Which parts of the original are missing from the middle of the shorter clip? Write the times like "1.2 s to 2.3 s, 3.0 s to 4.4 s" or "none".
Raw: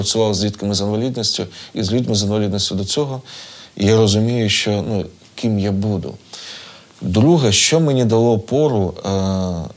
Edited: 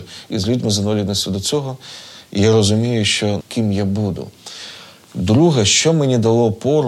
4.8 s to 5.3 s